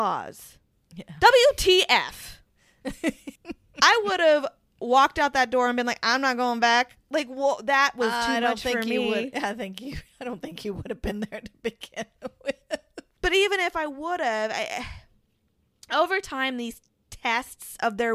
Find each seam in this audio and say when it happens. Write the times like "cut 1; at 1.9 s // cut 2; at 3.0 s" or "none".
cut 1; at 3.4 s